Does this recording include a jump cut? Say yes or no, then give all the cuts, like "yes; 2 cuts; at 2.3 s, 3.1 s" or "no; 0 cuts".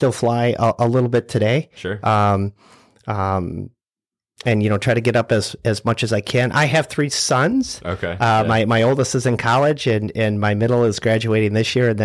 no; 0 cuts